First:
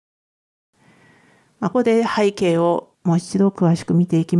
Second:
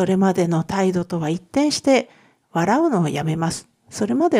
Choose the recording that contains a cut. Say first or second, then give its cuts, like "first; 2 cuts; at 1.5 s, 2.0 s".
first; 2 cuts; at 1.7 s, 2.9 s